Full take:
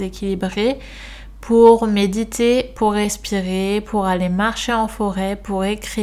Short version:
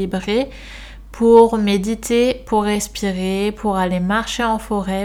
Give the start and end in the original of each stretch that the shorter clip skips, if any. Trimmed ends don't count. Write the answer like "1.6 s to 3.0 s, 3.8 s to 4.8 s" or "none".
none